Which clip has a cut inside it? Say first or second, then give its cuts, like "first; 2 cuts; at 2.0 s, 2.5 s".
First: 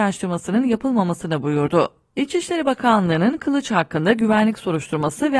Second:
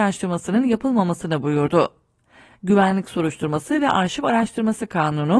first; 1 cut; at 2.1 s